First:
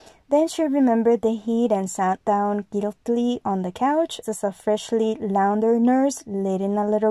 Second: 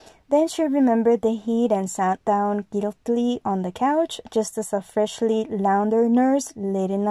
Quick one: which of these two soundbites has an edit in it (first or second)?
first